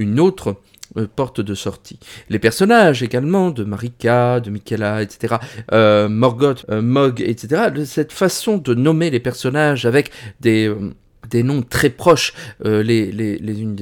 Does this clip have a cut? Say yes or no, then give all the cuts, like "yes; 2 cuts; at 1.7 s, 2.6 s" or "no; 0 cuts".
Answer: yes; 1 cut; at 6.6 s